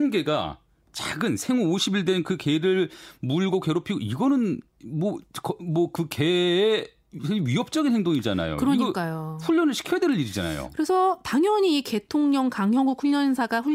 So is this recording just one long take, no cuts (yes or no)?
yes